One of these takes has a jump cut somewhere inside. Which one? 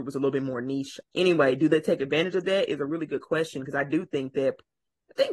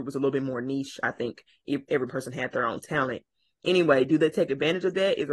first; 1 cut; at 1.0 s

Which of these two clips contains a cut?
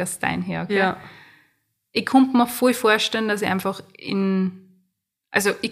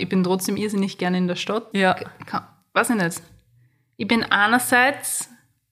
second; 1 cut; at 1.7 s

